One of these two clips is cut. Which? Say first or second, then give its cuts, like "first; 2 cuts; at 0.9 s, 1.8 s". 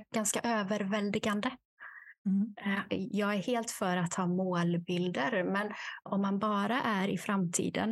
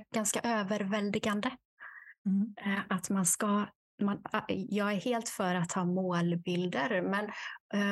first; 2 cuts; at 2.9 s, 6.1 s